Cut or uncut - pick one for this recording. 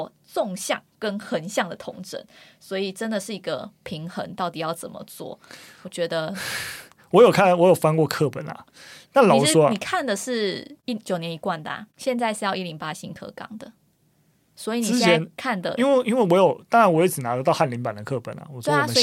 uncut